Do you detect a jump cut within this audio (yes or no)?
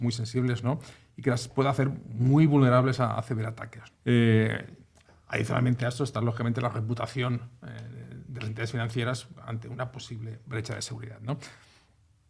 yes